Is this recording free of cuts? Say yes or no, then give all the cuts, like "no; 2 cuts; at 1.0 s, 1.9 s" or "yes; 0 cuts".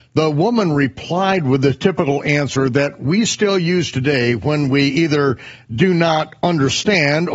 yes; 0 cuts